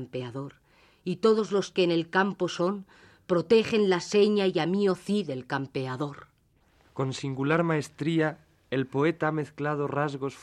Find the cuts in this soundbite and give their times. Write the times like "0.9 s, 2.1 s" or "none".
none

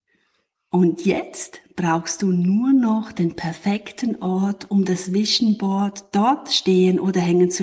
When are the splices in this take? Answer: none

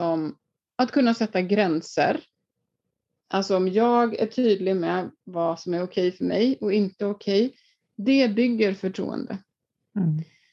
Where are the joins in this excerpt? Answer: none

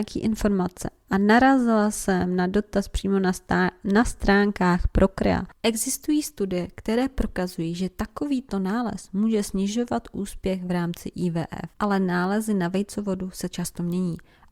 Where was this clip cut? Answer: 5.5 s, 11.7 s

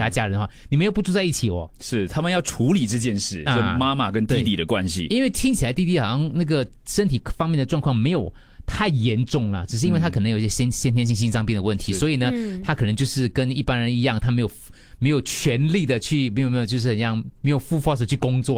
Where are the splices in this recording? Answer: none

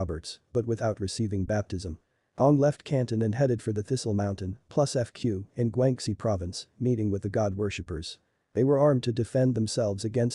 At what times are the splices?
none

